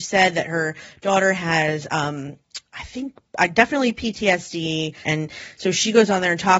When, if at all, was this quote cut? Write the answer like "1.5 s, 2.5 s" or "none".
5.0 s